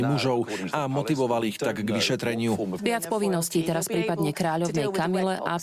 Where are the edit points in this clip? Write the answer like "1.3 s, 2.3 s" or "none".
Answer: 2.8 s